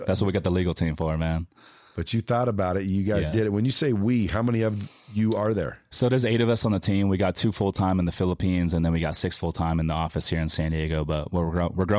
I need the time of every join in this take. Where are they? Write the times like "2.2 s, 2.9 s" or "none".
none